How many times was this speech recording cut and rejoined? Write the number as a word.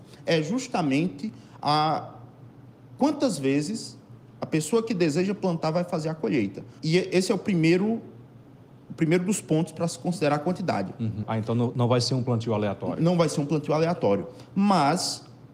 two